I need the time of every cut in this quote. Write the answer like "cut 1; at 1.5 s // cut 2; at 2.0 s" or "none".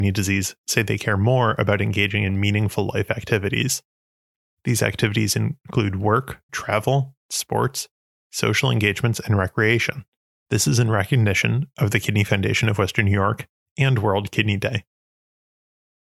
cut 1; at 6.5 s // cut 2; at 10.5 s